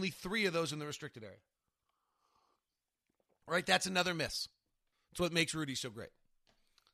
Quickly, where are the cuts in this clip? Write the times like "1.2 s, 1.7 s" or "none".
3.4 s, 4.9 s